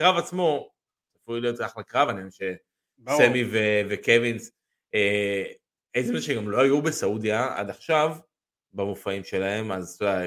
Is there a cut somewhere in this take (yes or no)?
no